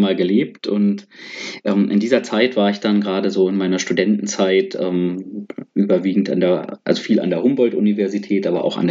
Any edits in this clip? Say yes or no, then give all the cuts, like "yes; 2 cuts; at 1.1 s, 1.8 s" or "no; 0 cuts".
no; 0 cuts